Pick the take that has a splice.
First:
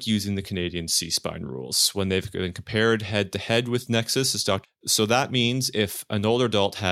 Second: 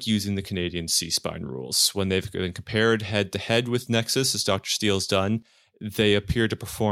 first; 1 cut; at 4.6 s

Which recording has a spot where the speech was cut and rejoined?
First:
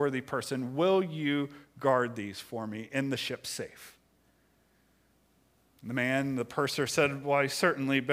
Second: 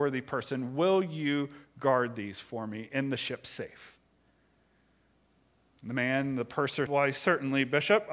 second; 1 cut; at 6.9 s

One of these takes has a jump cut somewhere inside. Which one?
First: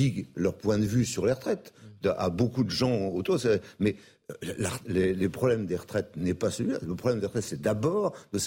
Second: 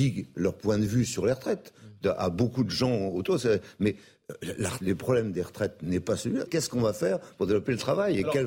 second; 2 cuts; at 4.8 s, 6.5 s

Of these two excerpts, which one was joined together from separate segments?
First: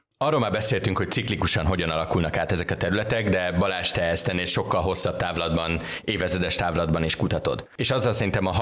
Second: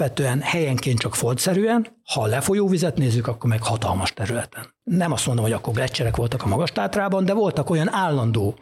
second; 1 cut; at 4.8 s

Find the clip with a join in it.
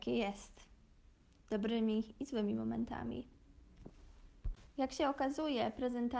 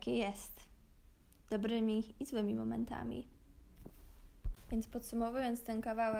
first; 1 cut; at 4.7 s

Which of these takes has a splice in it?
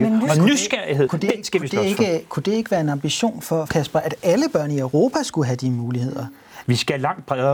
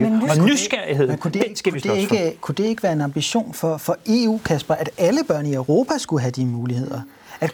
first; 3 cuts; at 1.1 s, 3.7 s, 6.6 s

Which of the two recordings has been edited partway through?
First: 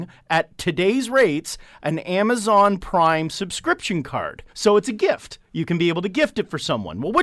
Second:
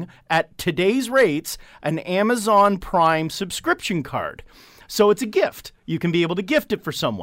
first; 1 cut; at 4.5 s

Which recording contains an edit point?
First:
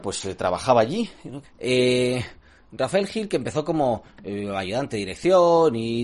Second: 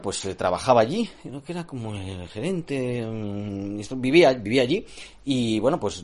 first; 1 cut; at 1.4 s

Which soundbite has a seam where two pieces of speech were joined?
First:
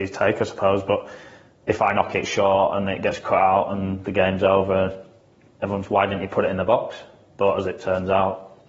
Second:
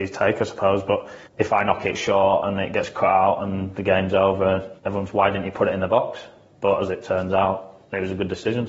second; 2 cuts; at 1.3 s, 4.8 s

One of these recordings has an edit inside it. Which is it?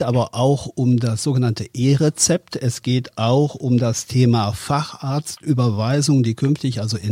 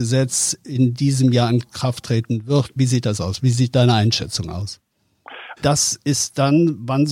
second; 2 cuts; at 2.8 s, 5.6 s

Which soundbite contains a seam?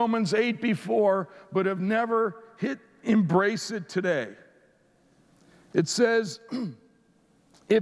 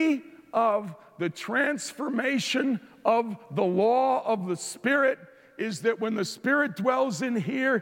first; 1 cut; at 3.0 s

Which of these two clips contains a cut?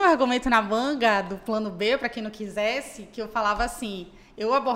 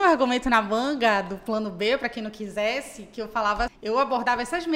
second; 1 cut; at 3.7 s

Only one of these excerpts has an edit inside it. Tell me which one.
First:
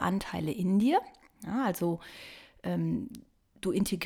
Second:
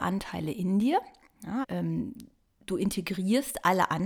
second; 1 cut; at 1.6 s

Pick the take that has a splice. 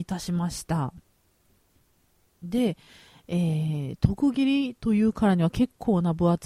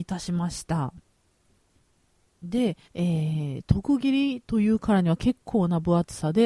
second; 1 cut; at 2.8 s

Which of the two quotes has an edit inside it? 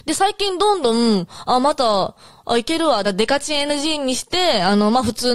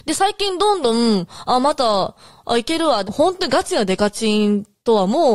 second; 1 cut; at 3.0 s

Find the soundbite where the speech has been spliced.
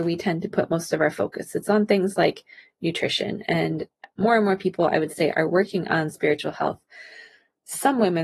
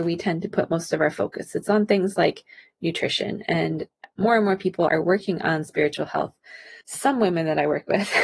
second; 2 cuts; at 4.9 s, 6.8 s

